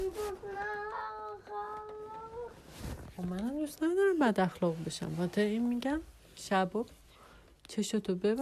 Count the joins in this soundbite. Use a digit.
1